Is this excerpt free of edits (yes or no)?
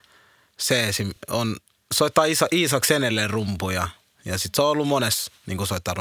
yes